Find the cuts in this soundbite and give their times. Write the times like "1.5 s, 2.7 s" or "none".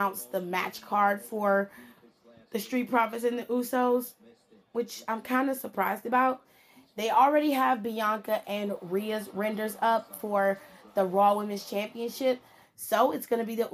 12.6 s